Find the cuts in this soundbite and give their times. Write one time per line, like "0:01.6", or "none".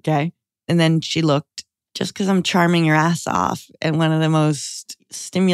0:01.8